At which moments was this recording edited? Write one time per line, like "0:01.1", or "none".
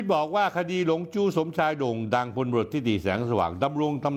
0:02.7